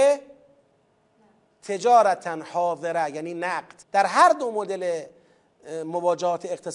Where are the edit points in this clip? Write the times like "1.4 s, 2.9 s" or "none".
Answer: 3.8 s